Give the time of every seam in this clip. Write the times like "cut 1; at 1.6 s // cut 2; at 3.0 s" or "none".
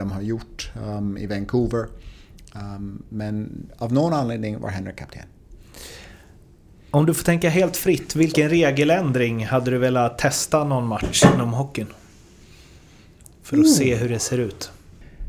none